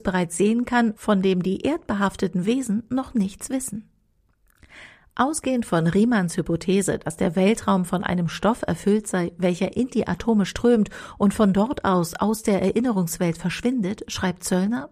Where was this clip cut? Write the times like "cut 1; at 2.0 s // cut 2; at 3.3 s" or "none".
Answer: none